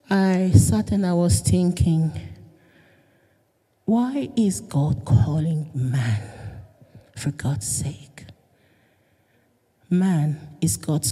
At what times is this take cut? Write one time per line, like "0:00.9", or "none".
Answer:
0:09.7